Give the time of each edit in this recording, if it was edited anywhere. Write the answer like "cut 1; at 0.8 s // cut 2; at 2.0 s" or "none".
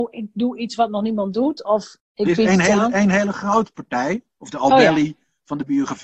cut 1; at 2.0 s // cut 2; at 4.3 s